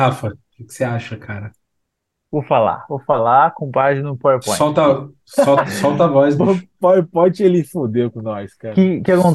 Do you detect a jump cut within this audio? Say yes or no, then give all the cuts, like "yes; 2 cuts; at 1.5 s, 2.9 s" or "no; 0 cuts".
no; 0 cuts